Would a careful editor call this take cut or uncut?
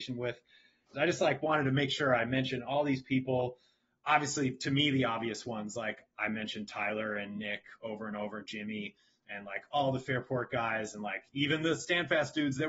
cut